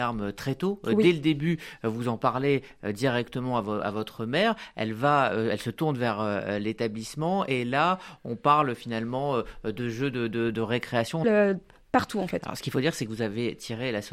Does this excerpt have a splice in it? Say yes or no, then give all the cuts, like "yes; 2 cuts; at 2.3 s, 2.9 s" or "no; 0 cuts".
yes; 1 cut; at 11.2 s